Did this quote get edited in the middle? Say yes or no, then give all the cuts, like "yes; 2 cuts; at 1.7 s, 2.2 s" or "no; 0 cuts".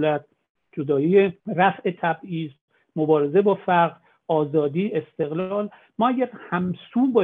yes; 1 cut; at 1.4 s